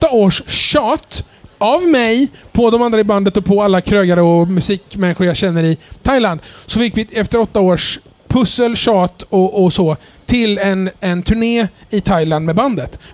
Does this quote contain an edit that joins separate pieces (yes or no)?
no